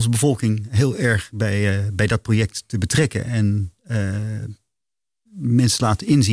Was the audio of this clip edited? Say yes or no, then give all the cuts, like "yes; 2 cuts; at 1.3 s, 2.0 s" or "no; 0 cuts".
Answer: no; 0 cuts